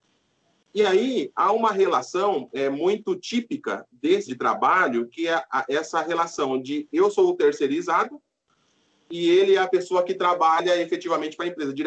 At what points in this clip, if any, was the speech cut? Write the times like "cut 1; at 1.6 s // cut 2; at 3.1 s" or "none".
cut 1; at 4.3 s